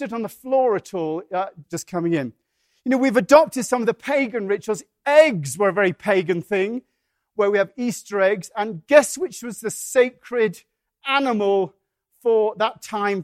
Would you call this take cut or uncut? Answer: cut